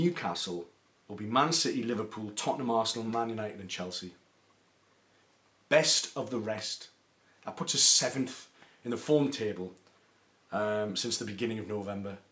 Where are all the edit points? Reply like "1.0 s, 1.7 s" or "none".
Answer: none